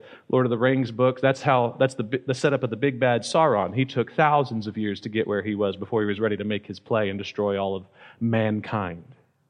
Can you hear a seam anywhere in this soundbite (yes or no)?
no